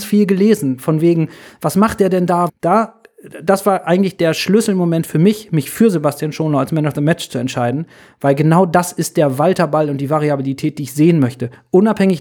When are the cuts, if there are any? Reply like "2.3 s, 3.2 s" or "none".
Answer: 2.5 s